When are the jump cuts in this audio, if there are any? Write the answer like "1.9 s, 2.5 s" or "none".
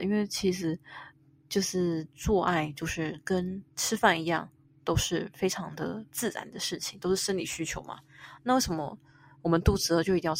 3.7 s

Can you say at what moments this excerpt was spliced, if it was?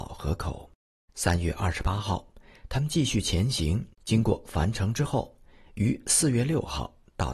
1.1 s, 3.9 s

